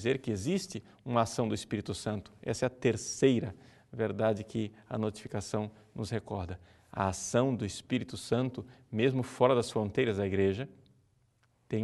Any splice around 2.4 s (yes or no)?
no